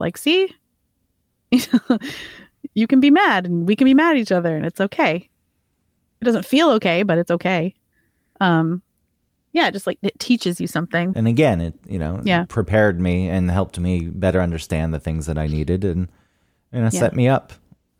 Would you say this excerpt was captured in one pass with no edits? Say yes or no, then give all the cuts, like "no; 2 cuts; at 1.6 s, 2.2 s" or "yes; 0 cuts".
no; 1 cut; at 11.1 s